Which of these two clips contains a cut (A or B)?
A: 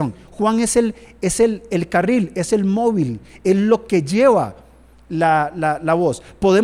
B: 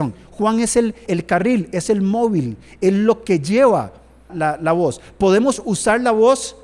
B